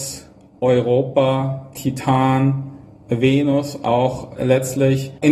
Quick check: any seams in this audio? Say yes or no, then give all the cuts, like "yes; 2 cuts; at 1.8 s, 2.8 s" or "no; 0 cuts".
no; 0 cuts